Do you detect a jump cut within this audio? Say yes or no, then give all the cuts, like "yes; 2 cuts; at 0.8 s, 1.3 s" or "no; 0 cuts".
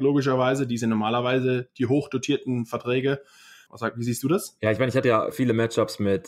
yes; 2 cuts; at 3.7 s, 5.3 s